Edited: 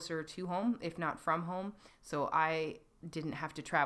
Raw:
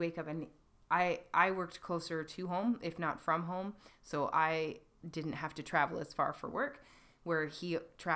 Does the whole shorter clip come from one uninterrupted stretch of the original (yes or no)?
yes